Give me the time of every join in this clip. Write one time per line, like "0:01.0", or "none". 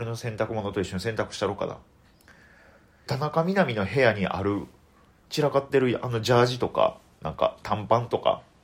0:03.1